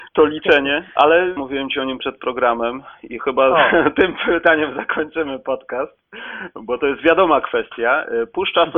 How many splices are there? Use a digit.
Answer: 1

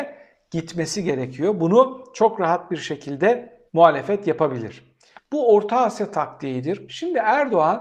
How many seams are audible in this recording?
3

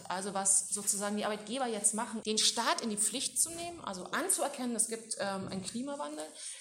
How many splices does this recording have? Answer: 1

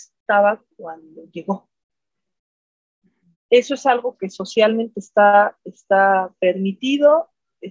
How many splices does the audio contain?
1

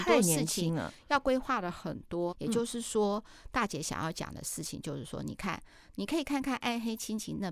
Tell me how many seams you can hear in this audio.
1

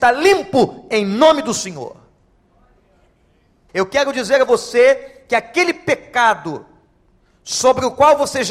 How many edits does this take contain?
1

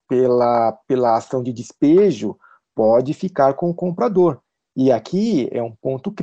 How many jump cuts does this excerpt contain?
0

